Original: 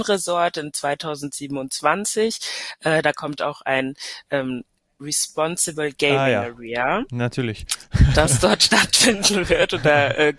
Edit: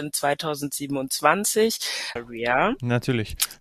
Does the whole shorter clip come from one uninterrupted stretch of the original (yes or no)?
no